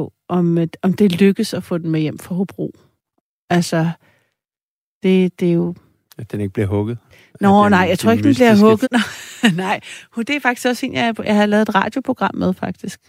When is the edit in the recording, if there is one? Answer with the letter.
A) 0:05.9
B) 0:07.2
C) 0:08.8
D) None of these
C